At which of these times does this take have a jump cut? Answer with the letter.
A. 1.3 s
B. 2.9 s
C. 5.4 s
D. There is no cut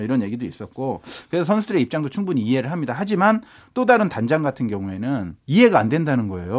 C